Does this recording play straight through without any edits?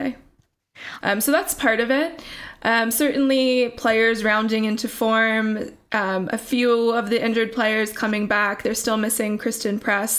no; 1 cut; at 1.0 s

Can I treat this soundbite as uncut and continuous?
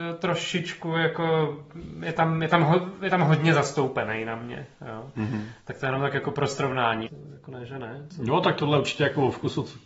no; 1 cut; at 7.1 s

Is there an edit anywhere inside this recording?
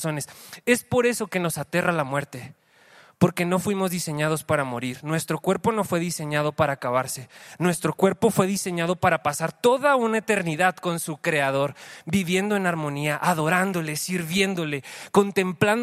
no; 0 cuts

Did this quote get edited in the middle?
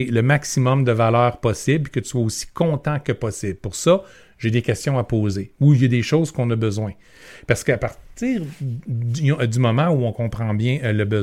no; 0 cuts

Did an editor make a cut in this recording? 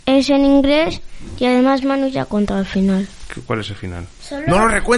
no; 0 cuts

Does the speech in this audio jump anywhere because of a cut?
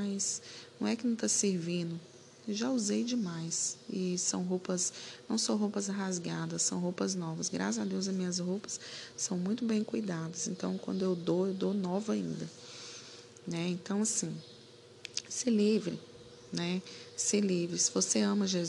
no; 0 cuts

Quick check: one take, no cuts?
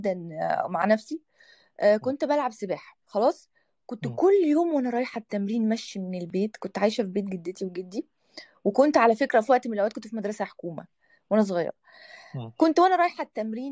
no; 1 cut; at 3.0 s

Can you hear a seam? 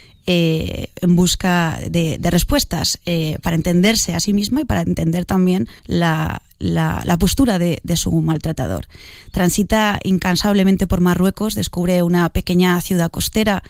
yes; 1 cut; at 5.8 s

